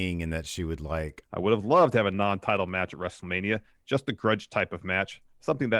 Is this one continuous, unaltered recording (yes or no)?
no